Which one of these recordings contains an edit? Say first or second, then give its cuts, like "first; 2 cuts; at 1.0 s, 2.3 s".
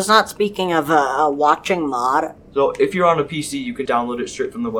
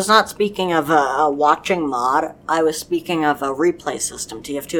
first; 2 cuts; at 2.4 s, 3.9 s